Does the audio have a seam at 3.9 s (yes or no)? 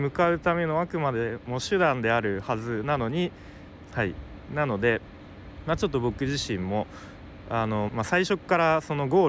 yes